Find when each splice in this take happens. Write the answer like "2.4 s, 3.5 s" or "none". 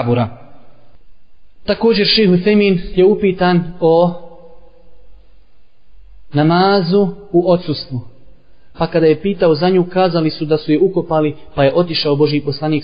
8.7 s